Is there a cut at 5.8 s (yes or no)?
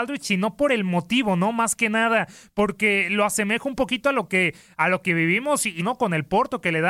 yes